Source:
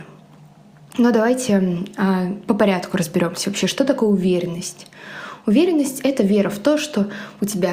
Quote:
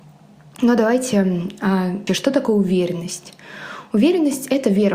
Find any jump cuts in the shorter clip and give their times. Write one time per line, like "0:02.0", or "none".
0:02.1